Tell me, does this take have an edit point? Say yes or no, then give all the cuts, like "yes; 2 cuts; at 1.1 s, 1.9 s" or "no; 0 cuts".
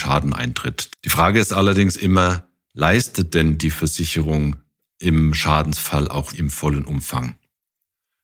yes; 2 cuts; at 0.9 s, 6.3 s